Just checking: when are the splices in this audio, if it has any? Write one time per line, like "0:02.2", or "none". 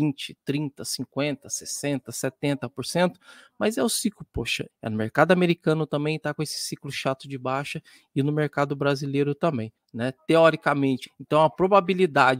0:04.7
0:09.8
0:11.1